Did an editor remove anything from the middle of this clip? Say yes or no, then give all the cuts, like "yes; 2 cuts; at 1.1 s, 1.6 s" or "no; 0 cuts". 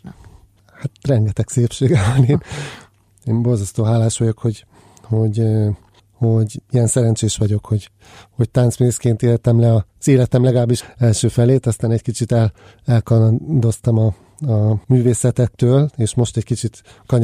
yes; 2 cuts; at 10.8 s, 14.8 s